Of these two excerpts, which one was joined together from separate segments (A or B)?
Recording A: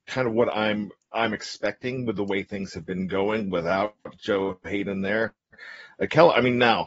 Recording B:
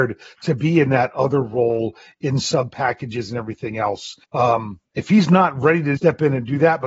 B